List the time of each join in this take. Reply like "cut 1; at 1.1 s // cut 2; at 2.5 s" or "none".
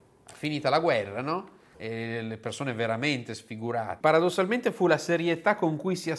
cut 1; at 1.7 s // cut 2; at 4.0 s